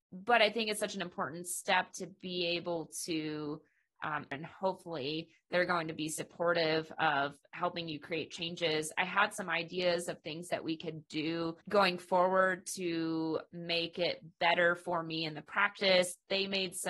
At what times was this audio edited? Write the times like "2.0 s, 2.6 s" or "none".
4.3 s, 11.6 s